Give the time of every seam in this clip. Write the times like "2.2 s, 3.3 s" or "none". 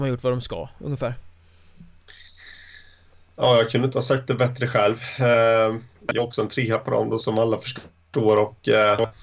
6.0 s